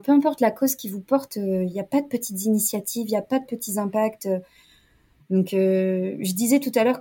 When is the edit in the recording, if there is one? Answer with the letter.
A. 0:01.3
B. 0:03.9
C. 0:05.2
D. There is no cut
C